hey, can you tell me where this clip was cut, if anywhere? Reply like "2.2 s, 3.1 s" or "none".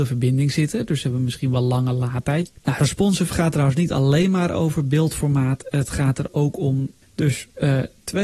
2.5 s, 7.0 s